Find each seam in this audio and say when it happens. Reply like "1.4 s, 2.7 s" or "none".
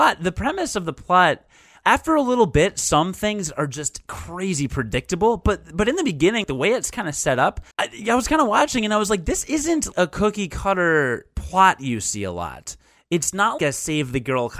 7.7 s, 13.6 s